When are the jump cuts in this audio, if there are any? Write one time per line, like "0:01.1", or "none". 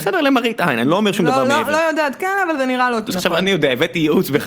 0:03.1